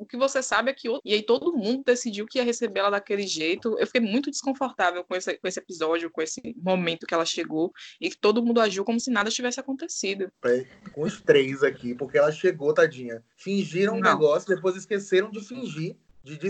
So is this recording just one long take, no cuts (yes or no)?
no